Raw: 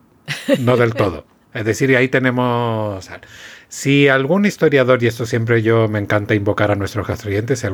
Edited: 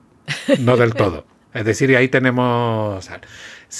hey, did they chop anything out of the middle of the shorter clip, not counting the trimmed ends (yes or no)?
no